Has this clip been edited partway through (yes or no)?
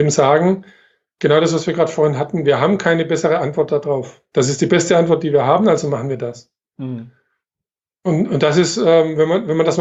no